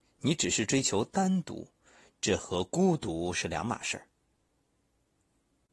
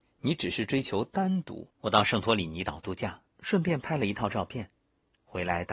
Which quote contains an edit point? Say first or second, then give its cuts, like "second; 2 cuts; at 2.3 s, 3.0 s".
second; 1 cut; at 1.7 s